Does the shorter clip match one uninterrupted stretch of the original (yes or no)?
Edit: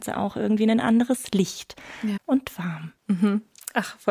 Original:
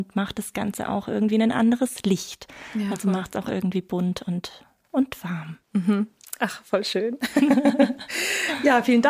no